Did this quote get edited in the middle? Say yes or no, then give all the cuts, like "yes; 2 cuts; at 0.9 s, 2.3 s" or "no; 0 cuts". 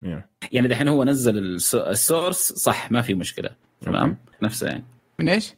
yes; 1 cut; at 4.4 s